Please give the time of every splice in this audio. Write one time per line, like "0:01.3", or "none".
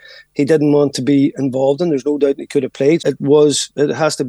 0:03.0